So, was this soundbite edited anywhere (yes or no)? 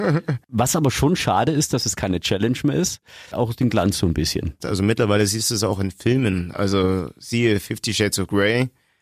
yes